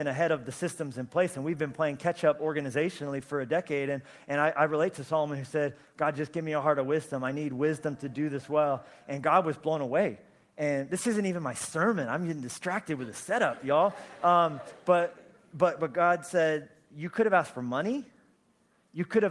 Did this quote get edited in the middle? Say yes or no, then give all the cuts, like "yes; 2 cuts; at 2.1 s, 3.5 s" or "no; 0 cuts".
no; 0 cuts